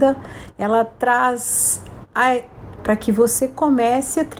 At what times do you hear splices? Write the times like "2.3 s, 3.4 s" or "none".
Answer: 2.8 s